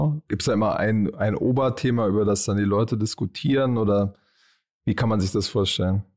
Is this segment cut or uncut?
uncut